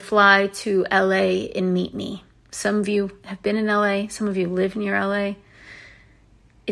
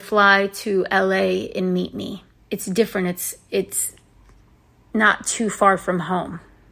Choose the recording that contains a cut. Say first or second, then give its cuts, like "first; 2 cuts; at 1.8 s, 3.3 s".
second; 1 cut; at 2.4 s